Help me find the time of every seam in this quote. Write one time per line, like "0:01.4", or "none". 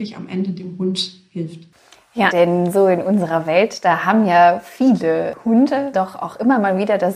0:02.3
0:05.9